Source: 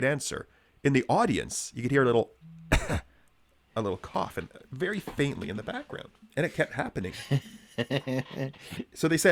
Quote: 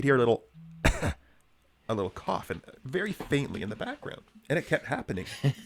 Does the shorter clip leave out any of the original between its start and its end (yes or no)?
no